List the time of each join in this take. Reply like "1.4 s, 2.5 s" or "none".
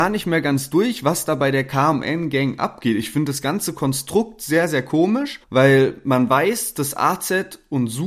5.4 s